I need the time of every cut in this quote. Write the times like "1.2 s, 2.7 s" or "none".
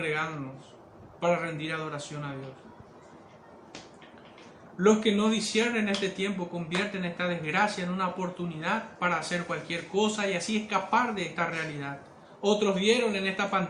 none